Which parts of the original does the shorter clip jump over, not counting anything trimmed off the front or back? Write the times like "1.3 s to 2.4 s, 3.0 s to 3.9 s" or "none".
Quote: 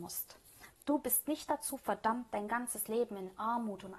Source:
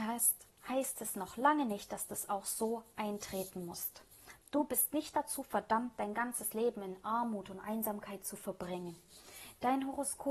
none